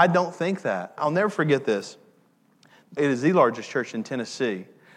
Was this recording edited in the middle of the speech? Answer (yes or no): yes